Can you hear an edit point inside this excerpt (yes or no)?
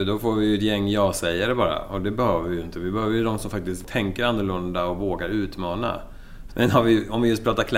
yes